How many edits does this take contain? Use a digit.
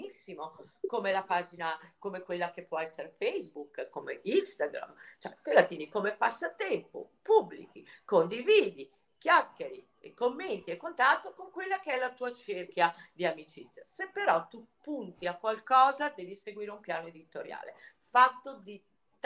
0